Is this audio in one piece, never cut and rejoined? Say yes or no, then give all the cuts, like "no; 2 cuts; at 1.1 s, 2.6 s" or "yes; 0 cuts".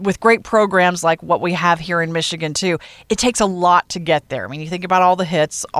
yes; 0 cuts